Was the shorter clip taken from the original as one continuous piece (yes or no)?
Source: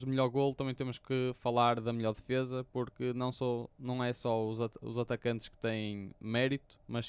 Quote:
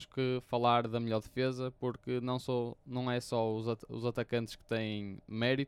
yes